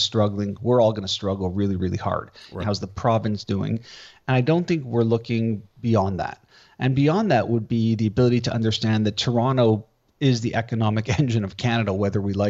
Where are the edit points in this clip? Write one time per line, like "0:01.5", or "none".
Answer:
0:02.6